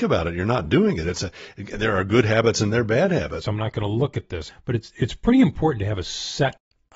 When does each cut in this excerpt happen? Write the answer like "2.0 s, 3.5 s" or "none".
3.4 s, 4.5 s